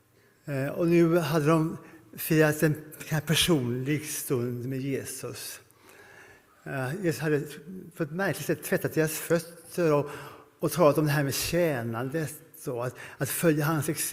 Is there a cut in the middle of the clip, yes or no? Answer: yes